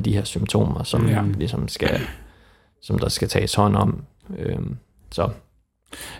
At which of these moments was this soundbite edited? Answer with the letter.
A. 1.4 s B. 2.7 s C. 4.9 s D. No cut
D